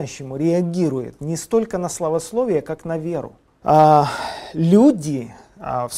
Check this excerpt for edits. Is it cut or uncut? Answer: cut